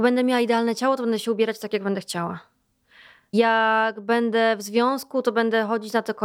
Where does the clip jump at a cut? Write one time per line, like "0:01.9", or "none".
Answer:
none